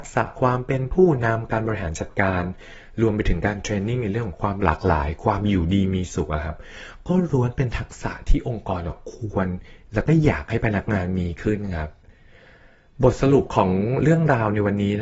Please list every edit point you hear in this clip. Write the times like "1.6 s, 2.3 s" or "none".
none